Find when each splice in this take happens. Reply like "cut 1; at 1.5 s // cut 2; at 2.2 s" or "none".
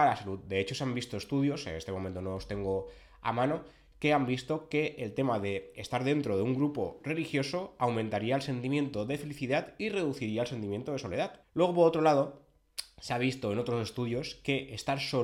cut 1; at 11.4 s